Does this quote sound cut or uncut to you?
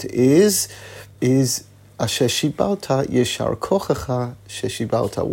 cut